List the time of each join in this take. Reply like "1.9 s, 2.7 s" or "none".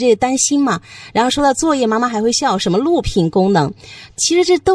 none